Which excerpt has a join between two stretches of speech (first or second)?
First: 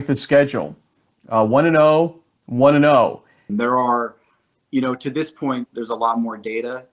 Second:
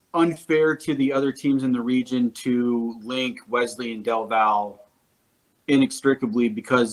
first